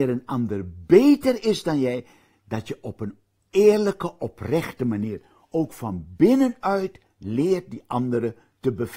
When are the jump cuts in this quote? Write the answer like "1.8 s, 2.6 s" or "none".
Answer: none

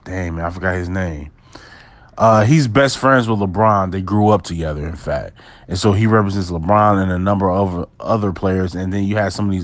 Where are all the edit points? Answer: none

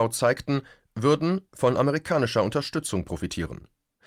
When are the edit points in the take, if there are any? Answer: 1.5 s

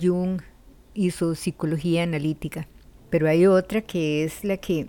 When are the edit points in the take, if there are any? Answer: 3.0 s

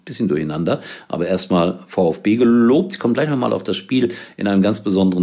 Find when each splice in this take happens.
none

